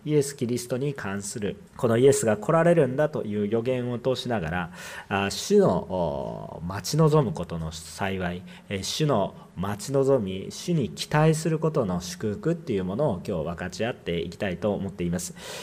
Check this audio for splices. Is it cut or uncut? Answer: cut